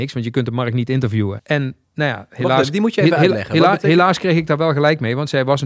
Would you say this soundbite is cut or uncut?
cut